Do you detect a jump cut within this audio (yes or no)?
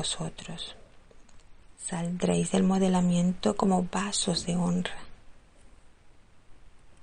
no